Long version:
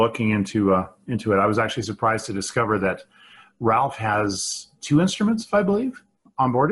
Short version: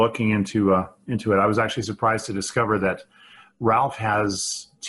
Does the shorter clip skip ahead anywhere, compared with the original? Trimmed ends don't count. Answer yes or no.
no